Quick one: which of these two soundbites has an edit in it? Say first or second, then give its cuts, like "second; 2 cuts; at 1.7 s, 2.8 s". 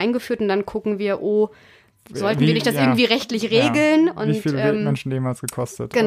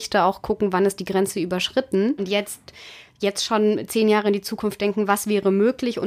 second; 1 cut; at 2.2 s